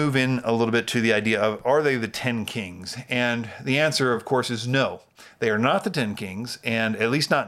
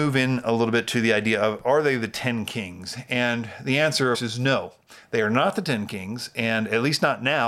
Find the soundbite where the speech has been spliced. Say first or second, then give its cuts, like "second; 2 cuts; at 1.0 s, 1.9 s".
second; 1 cut; at 4.1 s